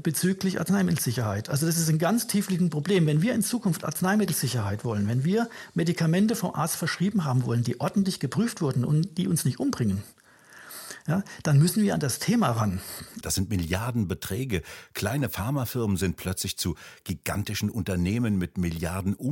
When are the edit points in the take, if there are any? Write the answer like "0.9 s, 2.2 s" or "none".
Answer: 13.2 s